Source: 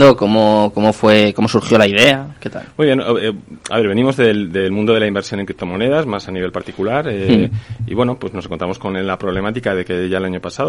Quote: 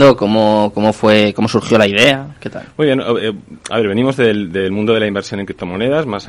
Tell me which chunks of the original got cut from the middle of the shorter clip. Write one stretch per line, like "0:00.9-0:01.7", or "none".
none